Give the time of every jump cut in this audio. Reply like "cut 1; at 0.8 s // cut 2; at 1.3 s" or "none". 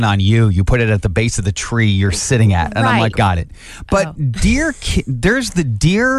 cut 1; at 3.1 s